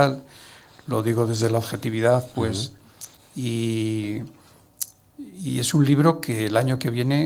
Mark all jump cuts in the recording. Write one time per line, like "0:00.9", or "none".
0:03.2